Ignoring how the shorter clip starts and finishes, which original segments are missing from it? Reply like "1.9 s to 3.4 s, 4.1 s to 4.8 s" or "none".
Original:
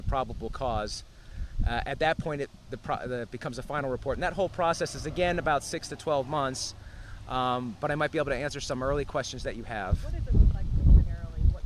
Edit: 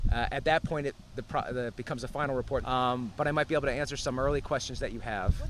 4.2 s to 7.2 s

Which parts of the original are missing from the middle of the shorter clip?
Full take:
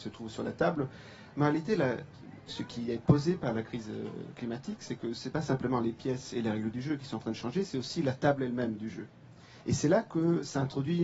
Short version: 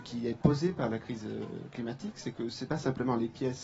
none

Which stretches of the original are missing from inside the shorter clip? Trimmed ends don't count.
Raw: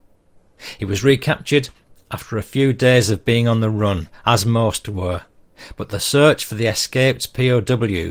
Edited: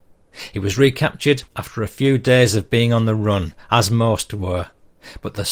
1.7 s to 2.0 s

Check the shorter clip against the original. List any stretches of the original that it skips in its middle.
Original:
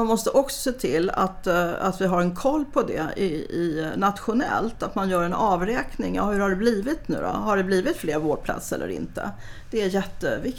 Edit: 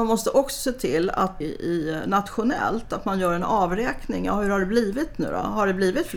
1.4 s to 3.3 s

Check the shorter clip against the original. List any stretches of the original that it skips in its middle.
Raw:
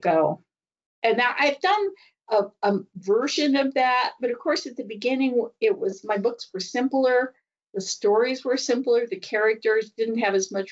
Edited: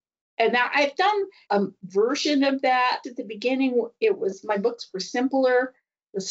2.1 s to 2.6 s, 4.2 s to 4.6 s

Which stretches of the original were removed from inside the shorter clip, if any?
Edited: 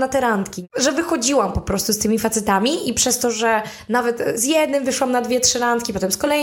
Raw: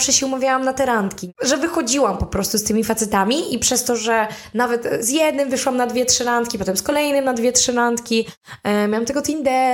none

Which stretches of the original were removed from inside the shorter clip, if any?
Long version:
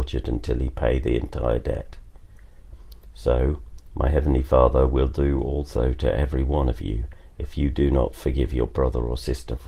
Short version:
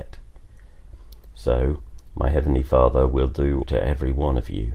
5.4 s to 5.9 s

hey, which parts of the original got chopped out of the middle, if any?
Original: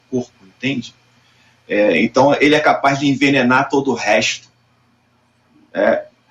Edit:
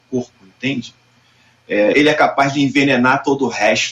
1.9 s to 2.4 s

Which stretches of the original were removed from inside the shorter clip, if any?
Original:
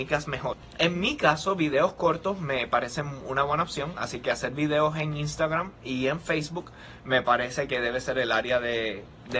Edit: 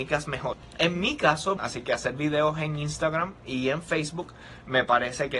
1.6 s to 3.9 s

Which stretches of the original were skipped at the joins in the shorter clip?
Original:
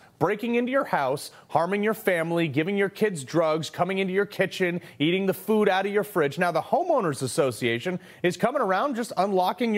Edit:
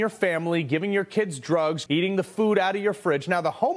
3.7 s to 5.0 s

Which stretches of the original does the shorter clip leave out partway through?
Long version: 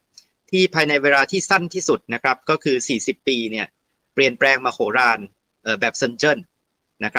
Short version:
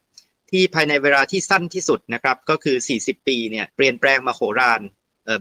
3.7 s to 4.1 s

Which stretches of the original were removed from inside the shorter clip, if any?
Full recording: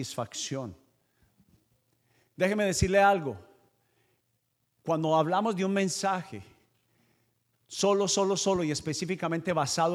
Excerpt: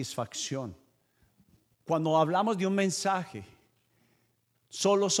1.7 s to 4.7 s

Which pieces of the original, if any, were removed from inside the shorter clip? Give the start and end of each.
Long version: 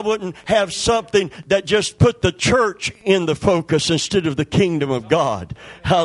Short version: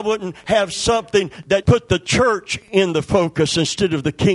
1.6 s to 2.0 s

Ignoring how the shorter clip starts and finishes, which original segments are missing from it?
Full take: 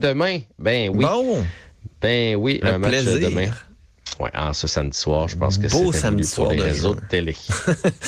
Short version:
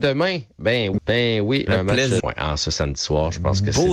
1.0 s to 1.9 s, 3.1 s to 4.2 s

